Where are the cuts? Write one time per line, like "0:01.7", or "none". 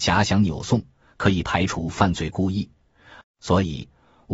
0:03.2